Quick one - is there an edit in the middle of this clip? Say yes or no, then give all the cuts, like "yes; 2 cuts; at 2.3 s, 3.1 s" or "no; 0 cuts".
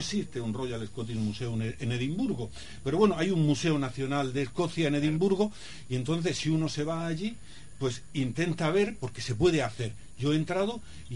no; 0 cuts